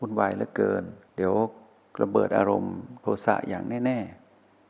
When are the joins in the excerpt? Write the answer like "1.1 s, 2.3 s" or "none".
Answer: 1.1 s